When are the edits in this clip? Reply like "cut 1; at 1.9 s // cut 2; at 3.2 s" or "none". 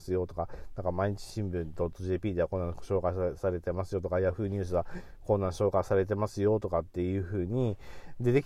none